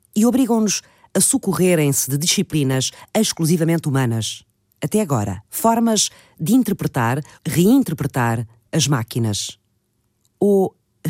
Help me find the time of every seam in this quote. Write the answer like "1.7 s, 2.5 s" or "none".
5.4 s, 7.3 s